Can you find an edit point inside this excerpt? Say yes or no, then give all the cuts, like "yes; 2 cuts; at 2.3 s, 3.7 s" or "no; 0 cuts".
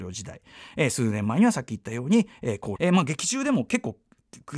yes; 1 cut; at 2.8 s